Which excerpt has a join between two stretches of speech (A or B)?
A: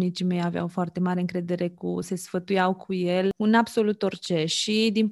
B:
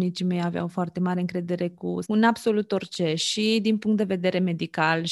B